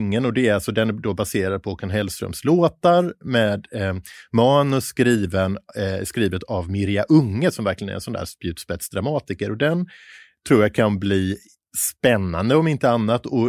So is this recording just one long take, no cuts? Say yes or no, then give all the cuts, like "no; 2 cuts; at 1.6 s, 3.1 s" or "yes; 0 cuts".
yes; 0 cuts